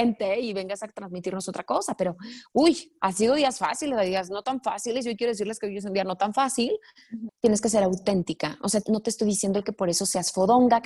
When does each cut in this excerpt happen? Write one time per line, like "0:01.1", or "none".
0:07.3
0:08.8